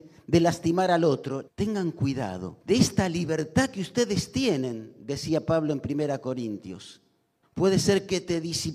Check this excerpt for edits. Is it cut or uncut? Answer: cut